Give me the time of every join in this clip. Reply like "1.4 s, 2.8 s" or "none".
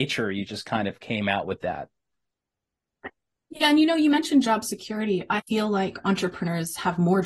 5.4 s